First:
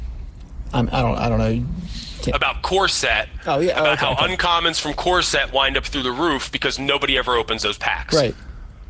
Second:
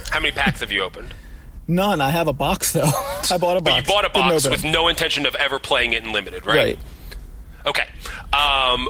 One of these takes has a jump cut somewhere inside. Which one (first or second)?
second